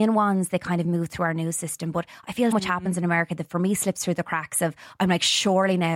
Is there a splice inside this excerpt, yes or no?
yes